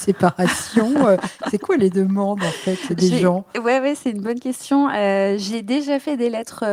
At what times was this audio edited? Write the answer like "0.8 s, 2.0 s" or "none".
2.9 s